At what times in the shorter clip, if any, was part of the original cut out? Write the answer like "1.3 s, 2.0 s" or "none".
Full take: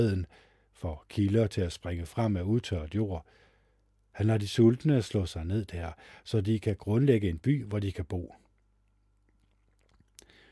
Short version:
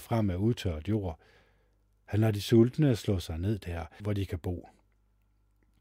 4.0 s